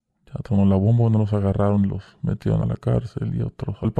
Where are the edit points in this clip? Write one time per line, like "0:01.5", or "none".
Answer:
0:02.6